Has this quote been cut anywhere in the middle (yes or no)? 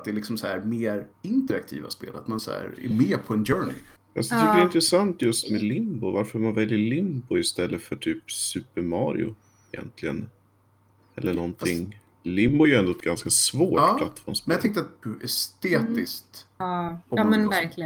yes